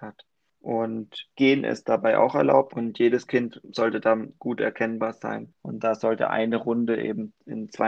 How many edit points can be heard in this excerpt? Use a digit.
2